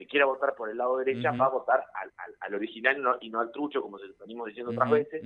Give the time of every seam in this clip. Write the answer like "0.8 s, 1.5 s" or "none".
none